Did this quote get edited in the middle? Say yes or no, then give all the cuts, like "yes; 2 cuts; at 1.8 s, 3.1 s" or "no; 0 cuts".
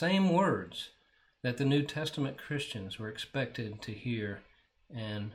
no; 0 cuts